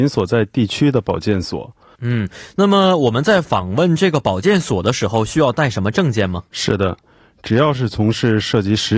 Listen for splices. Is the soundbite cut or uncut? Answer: cut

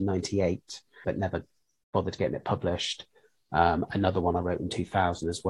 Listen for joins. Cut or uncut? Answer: cut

